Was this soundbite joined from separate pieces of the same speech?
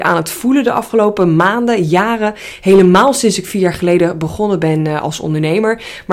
no; 0 cuts

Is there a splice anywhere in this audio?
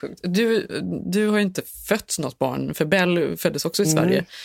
no; 0 cuts

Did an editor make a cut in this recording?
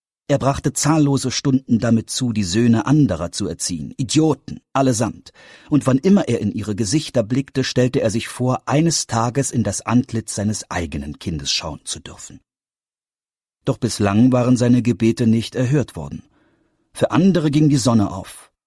no; 0 cuts

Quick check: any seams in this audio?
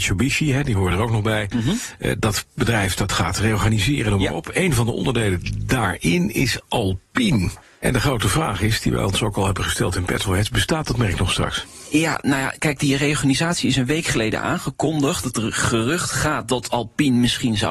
no; 0 cuts

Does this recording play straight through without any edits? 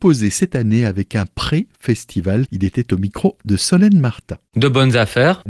no; 1 cut; at 2.5 s

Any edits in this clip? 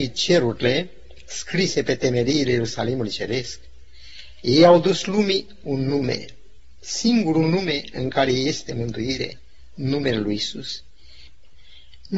no; 0 cuts

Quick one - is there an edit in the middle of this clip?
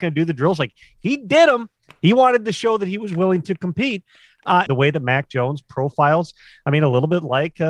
yes; 1 cut; at 4.7 s

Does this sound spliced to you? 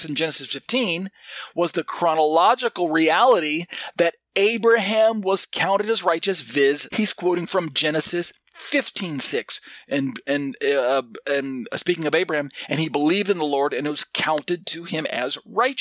yes; 1 cut; at 6.9 s

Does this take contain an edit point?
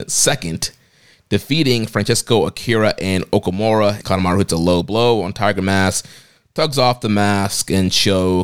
yes; 1 cut; at 4.0 s

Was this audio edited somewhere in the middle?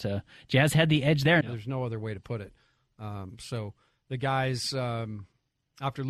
yes; 1 cut; at 1.4 s

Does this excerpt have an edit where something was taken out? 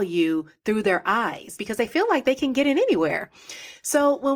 yes; 1 cut; at 1.6 s

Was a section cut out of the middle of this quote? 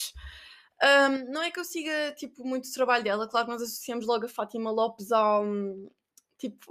no; 0 cuts

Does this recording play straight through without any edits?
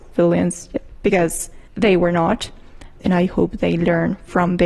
no; 2 cuts; at 1.7 s, 3.0 s

